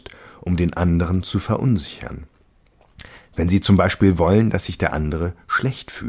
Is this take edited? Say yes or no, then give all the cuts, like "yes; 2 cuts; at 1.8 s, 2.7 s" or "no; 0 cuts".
no; 0 cuts